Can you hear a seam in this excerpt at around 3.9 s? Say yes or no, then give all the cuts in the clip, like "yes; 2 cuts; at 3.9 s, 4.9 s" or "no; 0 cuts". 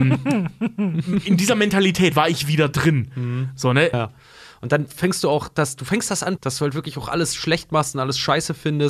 yes; 2 cuts; at 3.9 s, 6.4 s